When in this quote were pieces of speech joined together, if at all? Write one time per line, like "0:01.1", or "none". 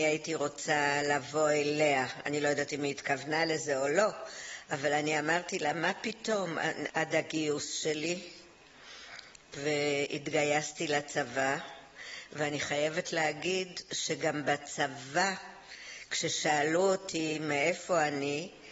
0:06.9